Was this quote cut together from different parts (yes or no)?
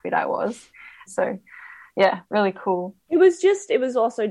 yes